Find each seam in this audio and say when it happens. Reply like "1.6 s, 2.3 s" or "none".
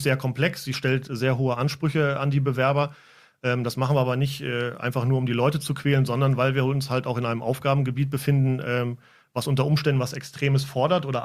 none